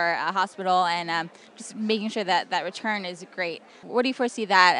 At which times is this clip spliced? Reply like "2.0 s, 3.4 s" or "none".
3.8 s

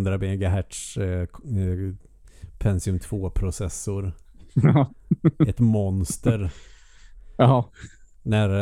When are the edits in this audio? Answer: none

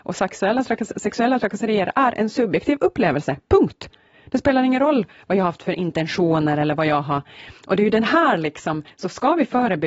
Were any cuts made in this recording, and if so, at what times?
none

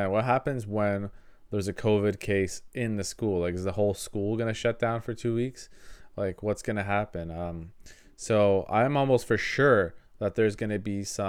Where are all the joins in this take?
none

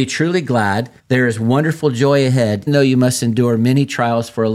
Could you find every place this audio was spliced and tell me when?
1.0 s, 2.7 s

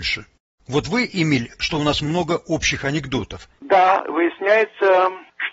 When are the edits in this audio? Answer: 1.5 s, 3.6 s

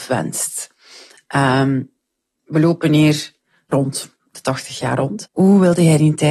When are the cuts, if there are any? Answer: 3.7 s, 5.2 s

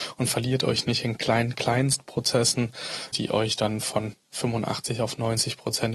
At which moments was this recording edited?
3.1 s

